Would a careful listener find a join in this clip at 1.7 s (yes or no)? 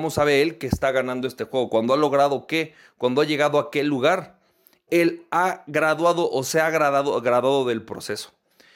no